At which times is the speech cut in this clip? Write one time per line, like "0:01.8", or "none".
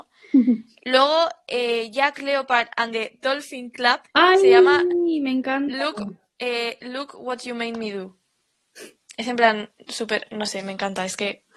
0:04.1